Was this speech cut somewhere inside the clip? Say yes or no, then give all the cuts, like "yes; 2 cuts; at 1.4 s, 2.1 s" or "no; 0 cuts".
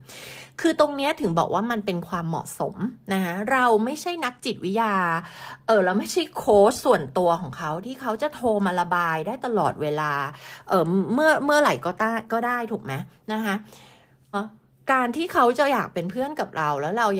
yes; 1 cut; at 14.3 s